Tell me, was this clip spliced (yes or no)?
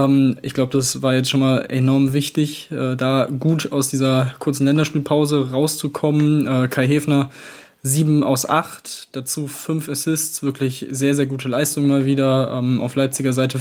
no